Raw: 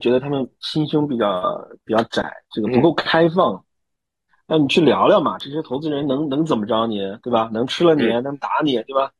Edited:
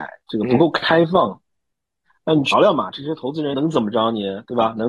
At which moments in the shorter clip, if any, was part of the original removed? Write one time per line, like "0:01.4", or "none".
0:02.5
0:03.5